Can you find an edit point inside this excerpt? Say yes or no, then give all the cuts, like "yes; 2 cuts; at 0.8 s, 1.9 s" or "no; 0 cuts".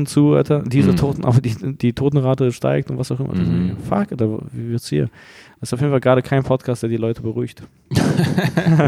no; 0 cuts